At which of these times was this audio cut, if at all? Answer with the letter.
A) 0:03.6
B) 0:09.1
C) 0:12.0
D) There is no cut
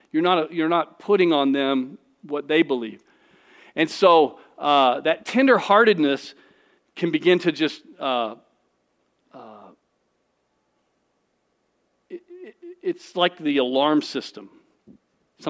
D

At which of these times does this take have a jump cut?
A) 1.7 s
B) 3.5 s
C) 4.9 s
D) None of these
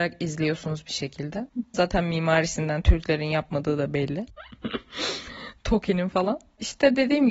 A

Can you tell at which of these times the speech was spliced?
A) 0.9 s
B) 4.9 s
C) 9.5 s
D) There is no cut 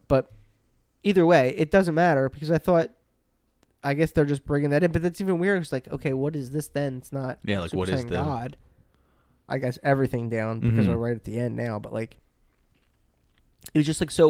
C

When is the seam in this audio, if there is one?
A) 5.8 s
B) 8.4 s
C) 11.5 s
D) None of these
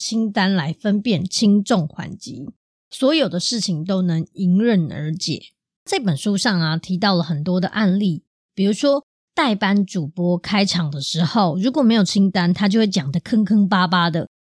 A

